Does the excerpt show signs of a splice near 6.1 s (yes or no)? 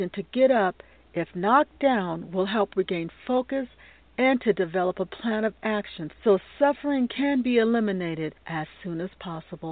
no